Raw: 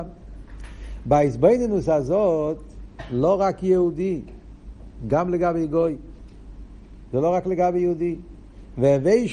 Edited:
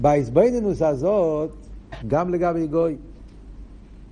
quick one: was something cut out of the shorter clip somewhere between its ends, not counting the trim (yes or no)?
yes